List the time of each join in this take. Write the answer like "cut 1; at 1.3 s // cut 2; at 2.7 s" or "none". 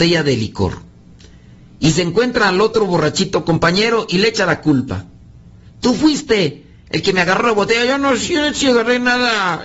none

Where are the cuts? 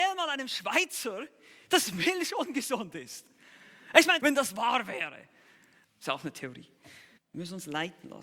cut 1; at 4.2 s // cut 2; at 5.8 s // cut 3; at 7.2 s

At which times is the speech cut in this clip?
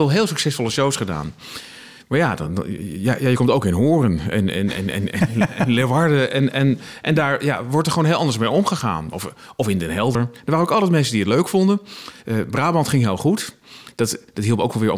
none

